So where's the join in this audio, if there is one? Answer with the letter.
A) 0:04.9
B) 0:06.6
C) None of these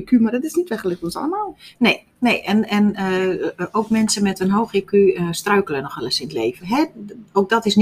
B